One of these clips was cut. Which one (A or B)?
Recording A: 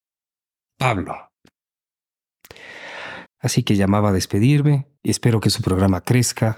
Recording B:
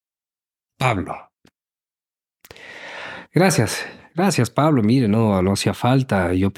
A